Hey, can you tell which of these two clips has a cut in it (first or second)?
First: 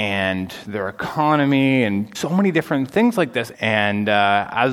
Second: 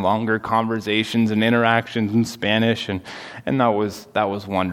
first